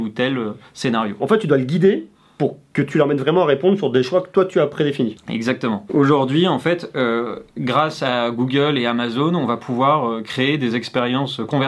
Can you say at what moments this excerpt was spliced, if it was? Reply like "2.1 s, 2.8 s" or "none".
1.2 s, 5.2 s